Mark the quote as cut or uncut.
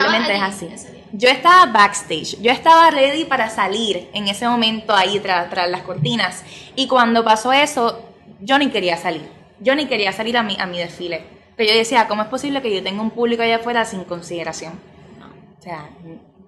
uncut